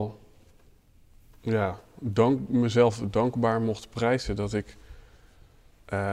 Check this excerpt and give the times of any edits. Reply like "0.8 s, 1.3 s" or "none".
none